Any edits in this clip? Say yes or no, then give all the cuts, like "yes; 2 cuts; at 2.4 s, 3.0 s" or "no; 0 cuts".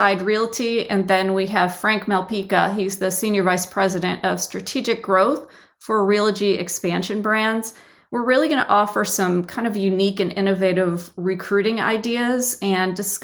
no; 0 cuts